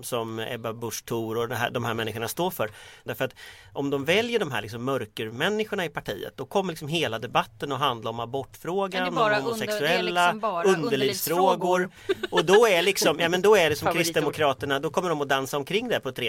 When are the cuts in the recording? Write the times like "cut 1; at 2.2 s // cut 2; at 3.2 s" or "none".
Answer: cut 1; at 3.1 s